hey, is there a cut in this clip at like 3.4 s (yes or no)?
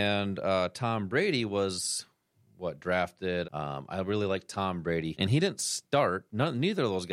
yes